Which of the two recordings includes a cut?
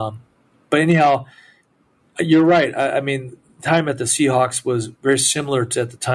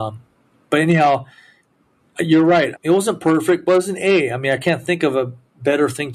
second; 1 cut; at 2.7 s

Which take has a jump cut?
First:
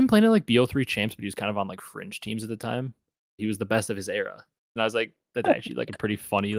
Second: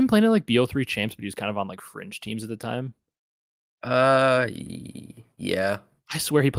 first; 2 cuts; at 3.4 s, 4.8 s

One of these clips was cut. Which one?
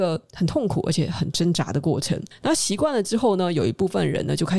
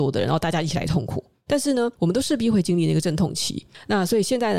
second; 1 cut; at 1.5 s

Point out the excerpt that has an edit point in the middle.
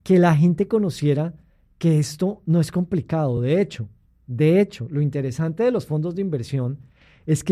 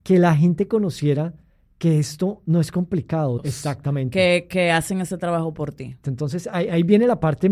second; 2 cuts; at 3.4 s, 6.0 s

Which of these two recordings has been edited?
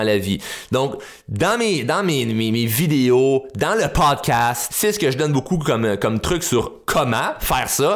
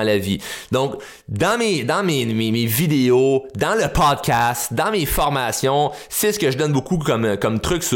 first; 1 cut; at 4.7 s

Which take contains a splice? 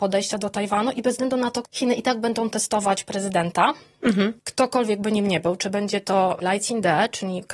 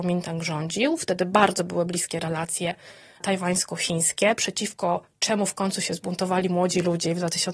first; 2 cuts; at 1.6 s, 6.4 s

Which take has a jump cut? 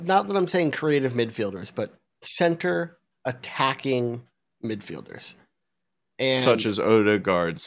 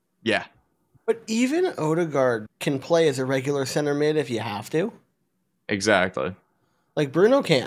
second; 2 cuts; at 1.0 s, 2.5 s

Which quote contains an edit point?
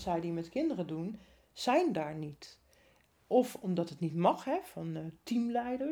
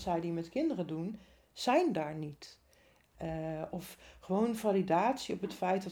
second; 1 cut; at 3.1 s

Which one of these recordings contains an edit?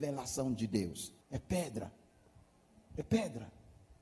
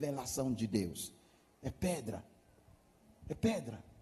first; 1 cut; at 1.2 s

